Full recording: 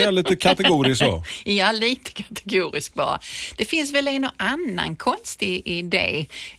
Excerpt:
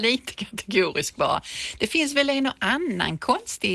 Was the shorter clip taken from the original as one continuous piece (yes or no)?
yes